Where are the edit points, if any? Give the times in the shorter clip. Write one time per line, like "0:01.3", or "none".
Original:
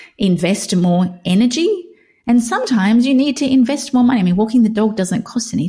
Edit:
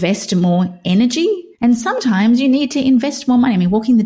0:01.5